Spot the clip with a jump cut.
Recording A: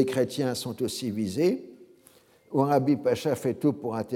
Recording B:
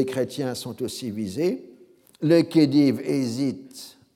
B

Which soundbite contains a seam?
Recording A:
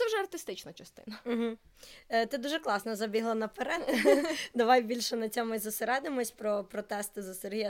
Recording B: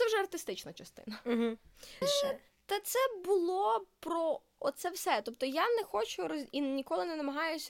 B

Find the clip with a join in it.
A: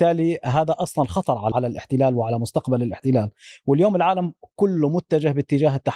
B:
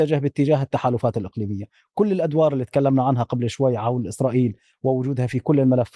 A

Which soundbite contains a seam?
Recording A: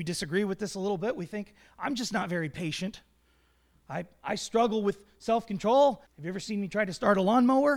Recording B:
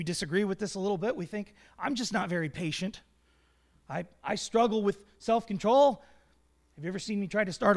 A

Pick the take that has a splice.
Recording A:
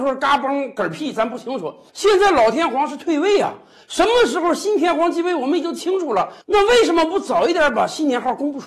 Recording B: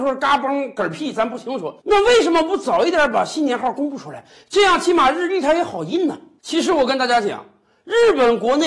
B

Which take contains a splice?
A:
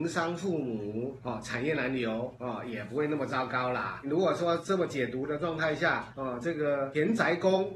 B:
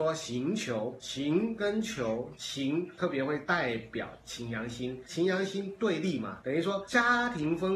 B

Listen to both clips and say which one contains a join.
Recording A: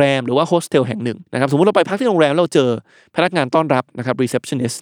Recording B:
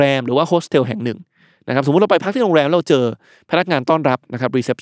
A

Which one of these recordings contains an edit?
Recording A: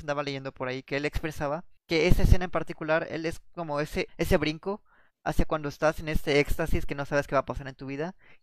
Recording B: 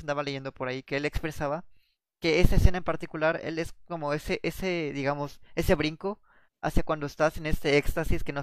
A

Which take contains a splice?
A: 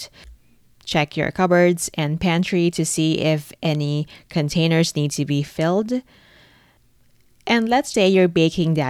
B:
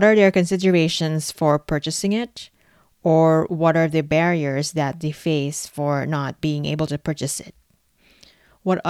A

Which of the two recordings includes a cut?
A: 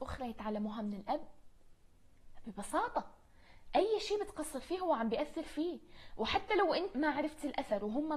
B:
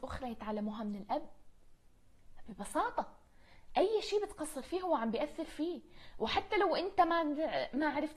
A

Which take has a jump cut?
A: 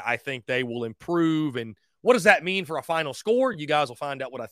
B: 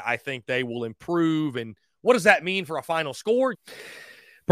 B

